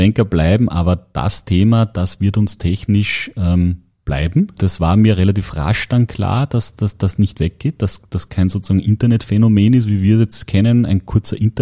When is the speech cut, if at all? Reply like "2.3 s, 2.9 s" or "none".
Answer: 4.6 s